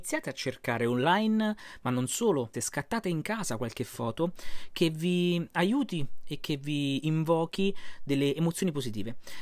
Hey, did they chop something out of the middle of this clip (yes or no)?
yes